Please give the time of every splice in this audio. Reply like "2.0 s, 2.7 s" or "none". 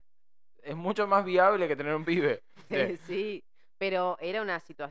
2.7 s